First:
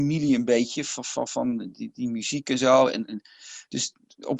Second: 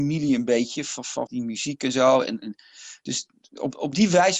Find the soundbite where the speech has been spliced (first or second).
second